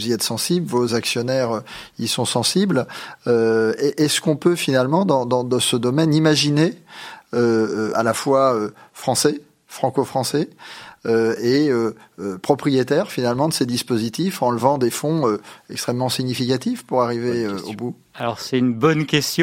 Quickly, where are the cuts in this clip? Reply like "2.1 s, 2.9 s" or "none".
7.9 s

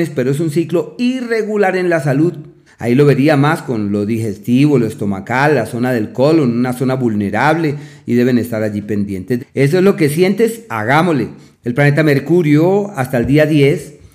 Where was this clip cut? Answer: 2.7 s, 9.4 s, 11.5 s

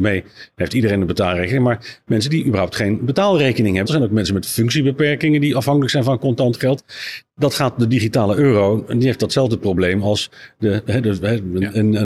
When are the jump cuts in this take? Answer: 3.8 s

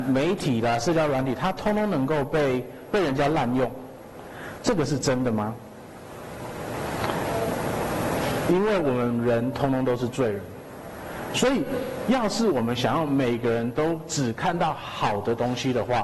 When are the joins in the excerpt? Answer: 4.6 s

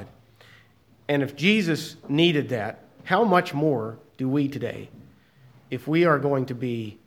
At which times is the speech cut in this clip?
none

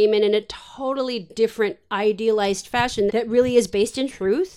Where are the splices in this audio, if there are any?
3.1 s

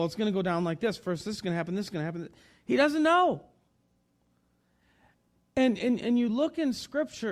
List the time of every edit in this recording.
none

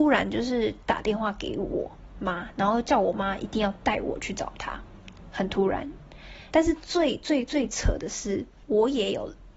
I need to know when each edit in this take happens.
2.6 s, 6.5 s

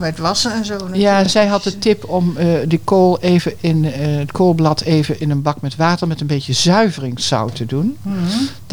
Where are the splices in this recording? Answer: none

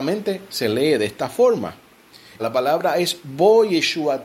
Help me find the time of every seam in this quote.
2.4 s

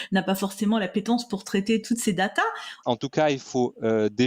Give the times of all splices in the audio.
2.8 s

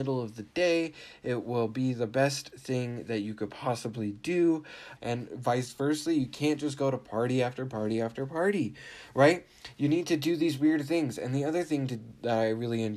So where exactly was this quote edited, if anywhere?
5.0 s

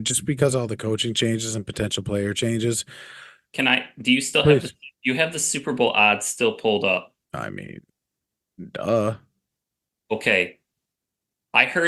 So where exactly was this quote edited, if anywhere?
3.5 s, 4.9 s, 7.2 s

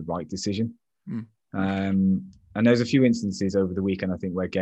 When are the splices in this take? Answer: none

